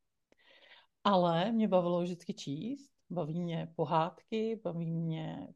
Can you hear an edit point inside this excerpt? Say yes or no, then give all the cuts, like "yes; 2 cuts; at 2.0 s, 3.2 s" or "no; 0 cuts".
no; 0 cuts